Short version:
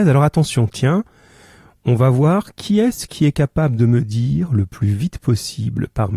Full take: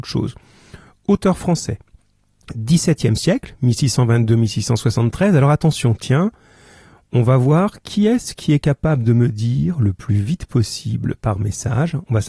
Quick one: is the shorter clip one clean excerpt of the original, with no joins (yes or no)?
yes